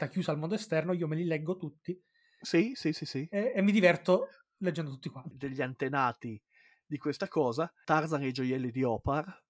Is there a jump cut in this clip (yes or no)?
yes